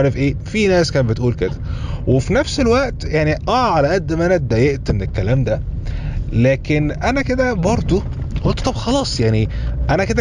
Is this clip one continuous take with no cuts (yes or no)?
no